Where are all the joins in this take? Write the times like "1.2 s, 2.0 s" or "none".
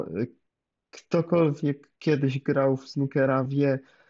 none